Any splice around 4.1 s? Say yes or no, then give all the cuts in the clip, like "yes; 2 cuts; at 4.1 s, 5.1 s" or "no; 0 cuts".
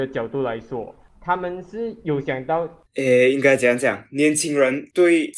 no; 1 cut; at 2.9 s